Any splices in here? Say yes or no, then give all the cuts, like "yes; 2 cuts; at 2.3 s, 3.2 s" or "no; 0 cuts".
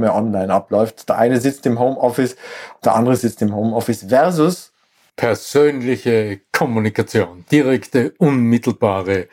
no; 0 cuts